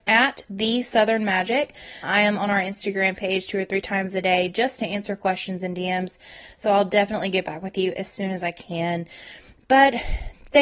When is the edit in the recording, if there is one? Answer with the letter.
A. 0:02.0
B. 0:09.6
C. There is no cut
A